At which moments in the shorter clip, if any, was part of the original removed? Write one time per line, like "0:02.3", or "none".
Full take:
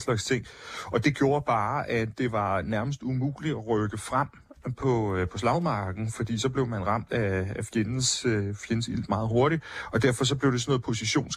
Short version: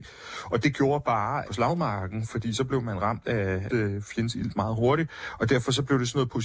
0:01.4
0:03.7